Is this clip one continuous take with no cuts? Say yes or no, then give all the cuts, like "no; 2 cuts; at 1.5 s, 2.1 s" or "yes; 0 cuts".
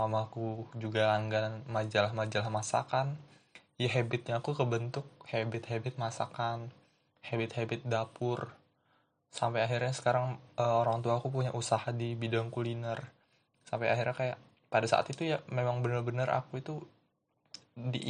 yes; 0 cuts